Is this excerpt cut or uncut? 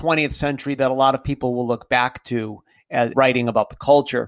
cut